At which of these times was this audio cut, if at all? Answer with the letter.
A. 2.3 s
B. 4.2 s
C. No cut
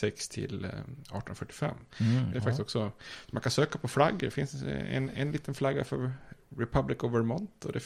A